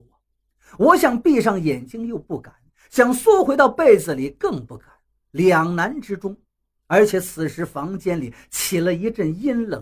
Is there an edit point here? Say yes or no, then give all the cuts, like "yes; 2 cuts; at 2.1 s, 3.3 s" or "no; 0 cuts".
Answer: no; 0 cuts